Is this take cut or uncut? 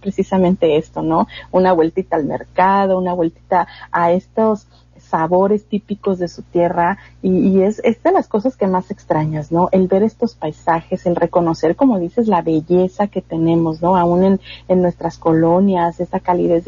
uncut